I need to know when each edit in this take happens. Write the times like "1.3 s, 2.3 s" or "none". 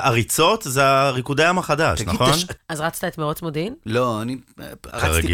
2.6 s

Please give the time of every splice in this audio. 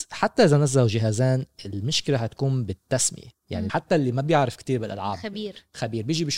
3.7 s

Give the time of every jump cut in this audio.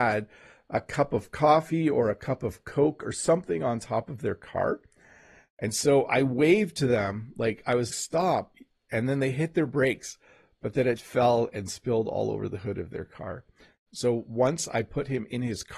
7.9 s, 11.0 s, 13.9 s

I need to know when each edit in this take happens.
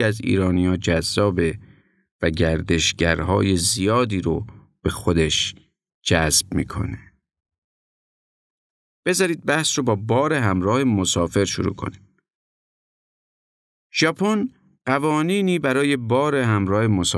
none

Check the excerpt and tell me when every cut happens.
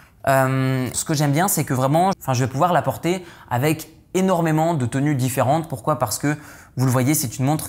0.9 s, 2.1 s

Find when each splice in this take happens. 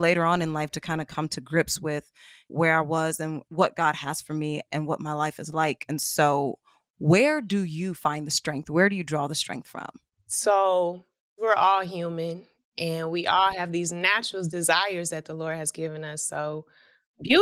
none

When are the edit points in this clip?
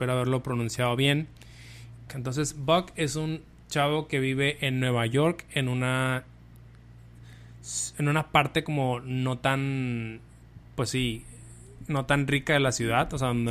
2.1 s

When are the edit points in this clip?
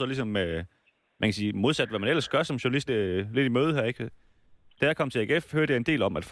2.9 s, 4.7 s

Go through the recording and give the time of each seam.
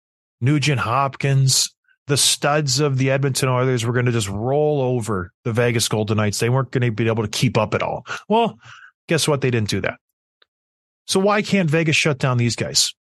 none

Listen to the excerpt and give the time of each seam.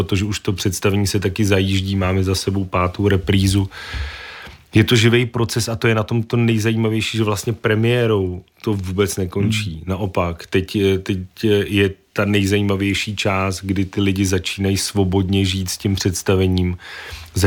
none

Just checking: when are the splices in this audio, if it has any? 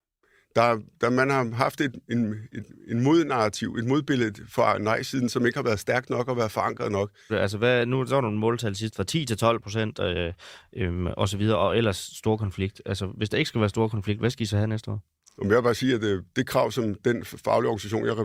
7.3 s

